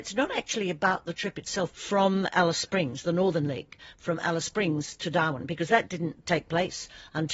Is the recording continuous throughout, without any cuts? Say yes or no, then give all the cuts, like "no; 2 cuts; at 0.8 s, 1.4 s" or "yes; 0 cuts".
no; 1 cut; at 1.7 s